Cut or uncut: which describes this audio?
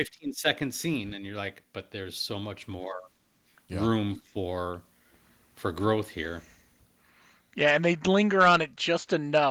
uncut